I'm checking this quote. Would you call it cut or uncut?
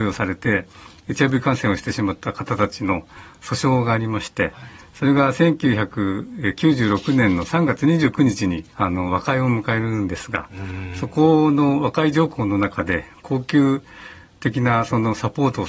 cut